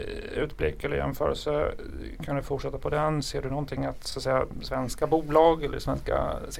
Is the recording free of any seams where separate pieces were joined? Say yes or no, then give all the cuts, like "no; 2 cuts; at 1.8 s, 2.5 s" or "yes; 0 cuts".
yes; 0 cuts